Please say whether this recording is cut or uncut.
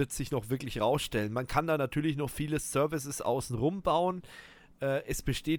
uncut